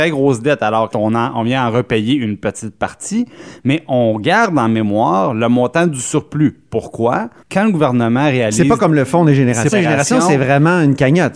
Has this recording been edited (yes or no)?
yes